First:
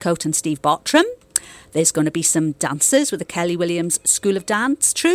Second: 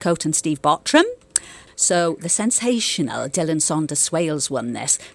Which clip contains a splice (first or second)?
second